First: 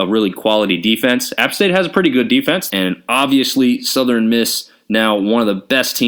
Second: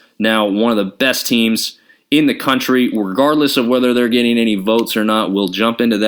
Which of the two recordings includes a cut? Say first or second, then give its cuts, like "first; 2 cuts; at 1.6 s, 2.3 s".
first; 1 cut; at 2.7 s